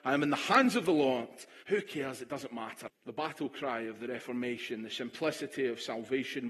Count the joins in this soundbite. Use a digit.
2